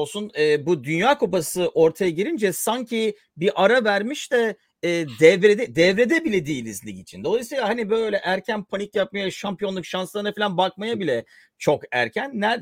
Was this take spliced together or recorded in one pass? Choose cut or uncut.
uncut